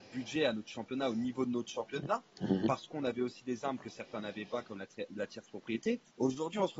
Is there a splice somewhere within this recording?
no; 0 cuts

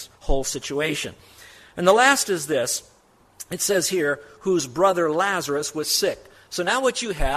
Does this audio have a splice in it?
no; 0 cuts

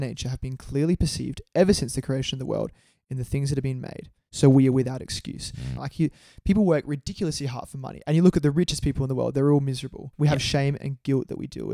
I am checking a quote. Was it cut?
yes; 2 cuts; at 5.8 s, 10.1 s

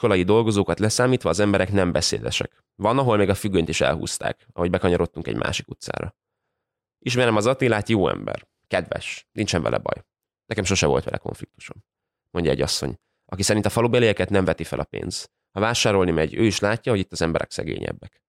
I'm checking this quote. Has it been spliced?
no; 0 cuts

